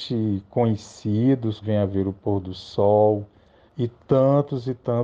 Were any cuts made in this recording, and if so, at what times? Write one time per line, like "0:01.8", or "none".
0:01.6
0:03.7